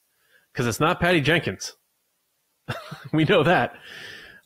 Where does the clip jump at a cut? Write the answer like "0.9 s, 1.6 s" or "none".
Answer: none